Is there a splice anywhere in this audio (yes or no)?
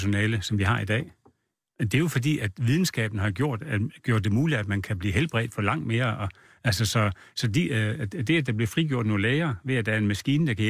no